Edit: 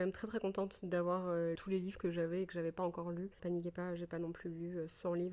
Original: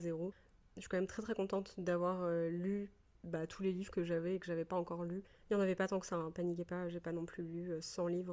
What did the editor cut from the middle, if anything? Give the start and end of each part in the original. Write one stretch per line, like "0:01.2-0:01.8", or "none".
0:02.5-0:03.5
0:05.3-0:06.3